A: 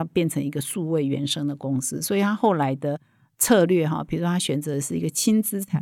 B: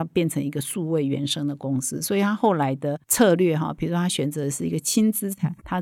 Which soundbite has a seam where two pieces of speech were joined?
B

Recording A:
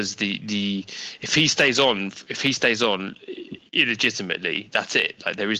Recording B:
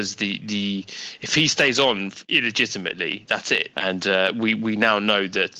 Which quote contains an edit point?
B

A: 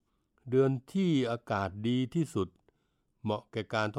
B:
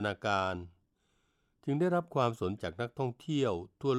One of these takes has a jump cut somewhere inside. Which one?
B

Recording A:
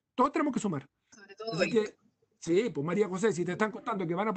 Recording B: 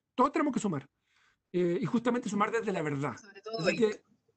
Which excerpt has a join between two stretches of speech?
A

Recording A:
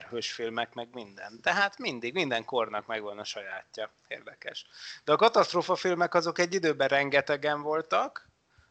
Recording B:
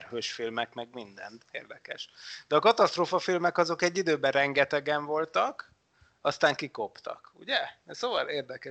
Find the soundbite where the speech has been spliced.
B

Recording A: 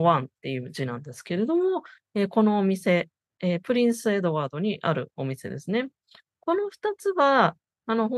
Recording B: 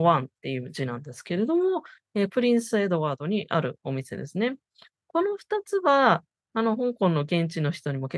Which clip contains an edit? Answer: B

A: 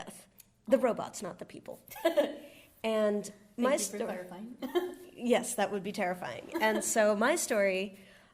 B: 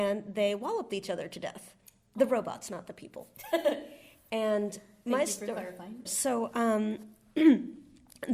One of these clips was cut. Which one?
B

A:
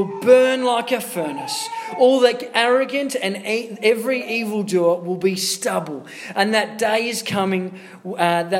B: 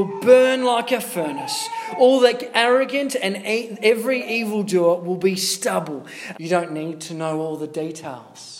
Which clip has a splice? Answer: B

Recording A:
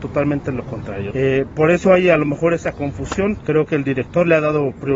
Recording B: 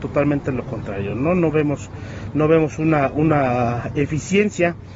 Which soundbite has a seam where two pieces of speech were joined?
A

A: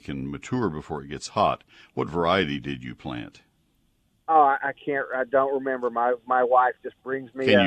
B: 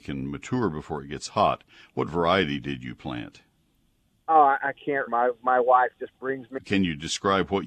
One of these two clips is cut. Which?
B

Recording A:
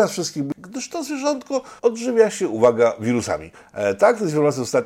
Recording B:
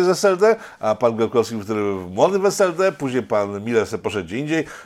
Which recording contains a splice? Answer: A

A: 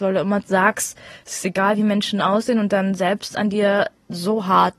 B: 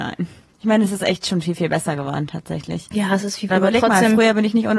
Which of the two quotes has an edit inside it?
B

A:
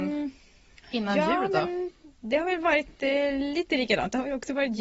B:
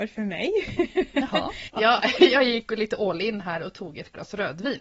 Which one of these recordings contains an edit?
B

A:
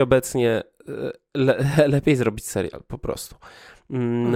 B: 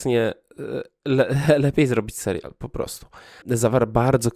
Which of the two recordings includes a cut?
B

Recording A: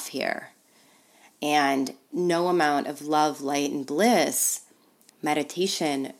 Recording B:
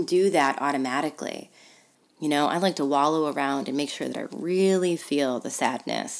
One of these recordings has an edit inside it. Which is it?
B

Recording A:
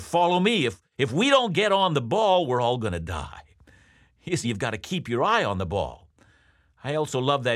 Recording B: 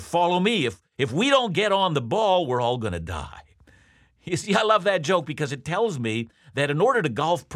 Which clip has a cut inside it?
A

